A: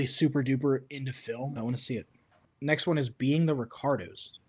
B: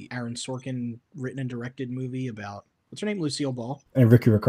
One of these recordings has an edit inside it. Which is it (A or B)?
A